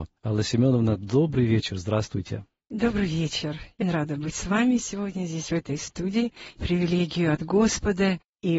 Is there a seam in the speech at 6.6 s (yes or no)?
yes